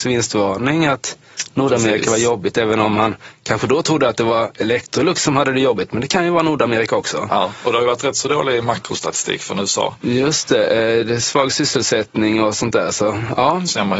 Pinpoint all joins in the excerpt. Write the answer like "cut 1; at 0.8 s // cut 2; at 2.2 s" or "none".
none